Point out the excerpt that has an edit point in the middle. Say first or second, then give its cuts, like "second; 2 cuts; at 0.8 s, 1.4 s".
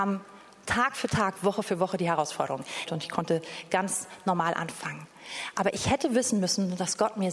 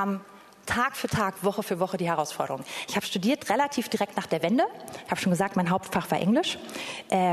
first; 1 cut; at 2.9 s